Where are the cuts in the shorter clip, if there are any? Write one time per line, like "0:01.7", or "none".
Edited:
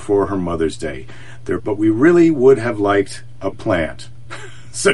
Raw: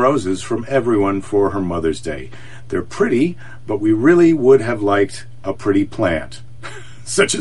0:01.6
0:03.5